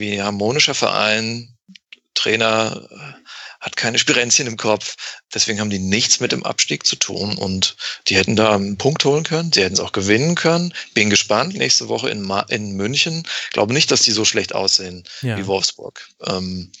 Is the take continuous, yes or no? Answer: no